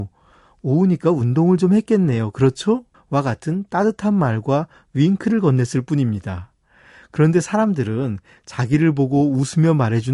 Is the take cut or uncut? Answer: cut